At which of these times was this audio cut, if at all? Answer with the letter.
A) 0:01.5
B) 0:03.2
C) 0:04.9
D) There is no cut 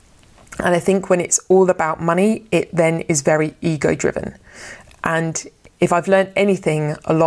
C